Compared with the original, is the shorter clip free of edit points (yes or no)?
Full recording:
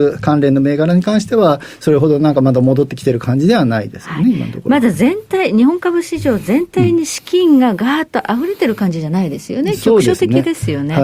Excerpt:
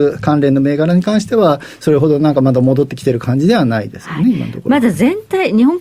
yes